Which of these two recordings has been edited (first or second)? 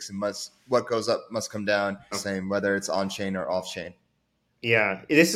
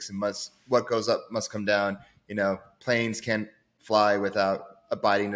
first